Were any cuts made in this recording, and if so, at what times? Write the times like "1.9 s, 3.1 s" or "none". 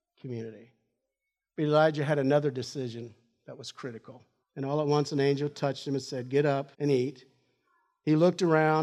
4.4 s, 6.7 s